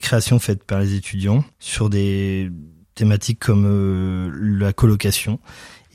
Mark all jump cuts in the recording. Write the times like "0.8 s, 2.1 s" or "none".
1.5 s